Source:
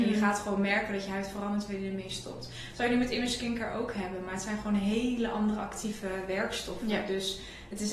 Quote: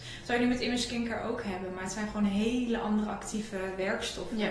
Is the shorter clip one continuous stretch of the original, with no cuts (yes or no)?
yes